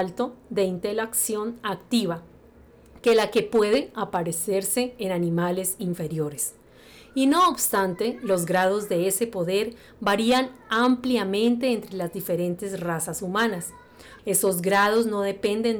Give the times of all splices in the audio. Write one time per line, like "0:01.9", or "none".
0:14.2